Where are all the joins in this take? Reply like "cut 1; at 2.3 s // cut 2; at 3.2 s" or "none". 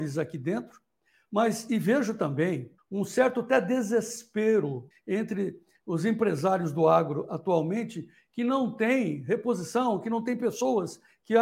cut 1; at 2.8 s // cut 2; at 4.9 s